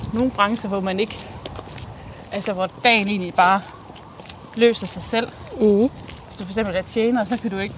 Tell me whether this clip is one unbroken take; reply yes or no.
yes